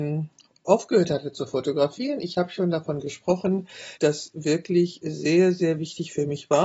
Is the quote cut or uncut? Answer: cut